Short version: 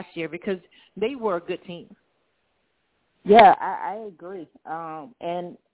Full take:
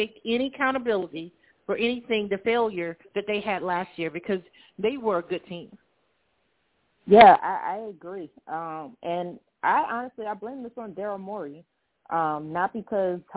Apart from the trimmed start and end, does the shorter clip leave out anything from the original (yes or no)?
no